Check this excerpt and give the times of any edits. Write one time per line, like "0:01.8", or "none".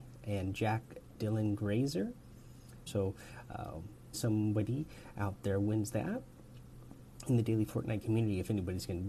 0:02.9
0:04.1